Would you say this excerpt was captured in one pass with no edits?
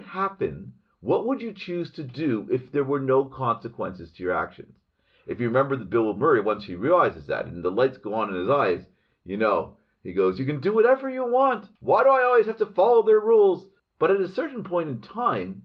no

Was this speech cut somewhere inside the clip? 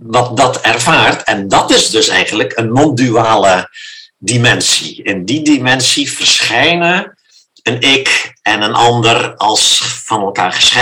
no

